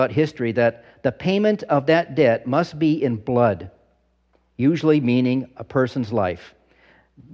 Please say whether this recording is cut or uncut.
uncut